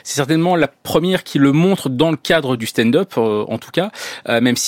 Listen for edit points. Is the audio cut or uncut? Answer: cut